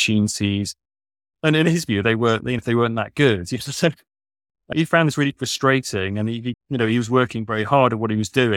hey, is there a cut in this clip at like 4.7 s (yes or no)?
yes